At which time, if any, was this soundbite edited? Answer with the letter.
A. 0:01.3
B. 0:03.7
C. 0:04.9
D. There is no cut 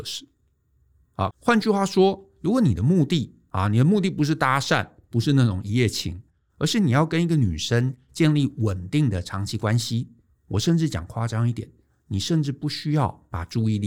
A